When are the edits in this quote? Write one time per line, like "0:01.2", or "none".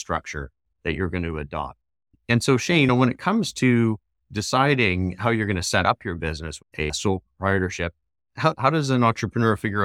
0:06.6
0:08.5